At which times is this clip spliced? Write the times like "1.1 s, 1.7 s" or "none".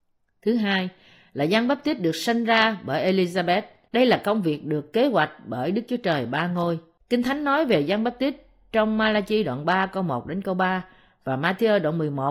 3.9 s, 7.0 s